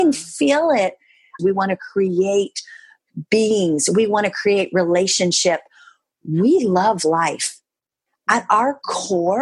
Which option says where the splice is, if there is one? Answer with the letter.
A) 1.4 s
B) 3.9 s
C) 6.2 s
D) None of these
A